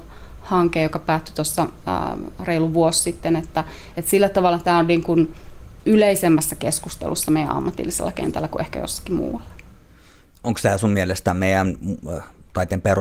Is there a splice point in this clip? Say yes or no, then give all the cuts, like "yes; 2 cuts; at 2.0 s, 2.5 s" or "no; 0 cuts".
no; 0 cuts